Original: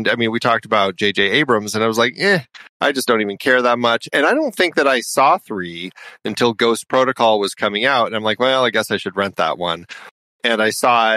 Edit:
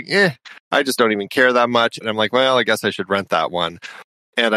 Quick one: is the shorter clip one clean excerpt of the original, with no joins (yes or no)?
no